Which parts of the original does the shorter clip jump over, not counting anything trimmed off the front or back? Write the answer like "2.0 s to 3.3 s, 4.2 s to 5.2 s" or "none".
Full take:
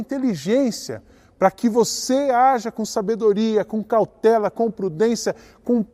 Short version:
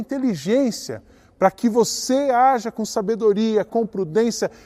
3.7 s to 4.5 s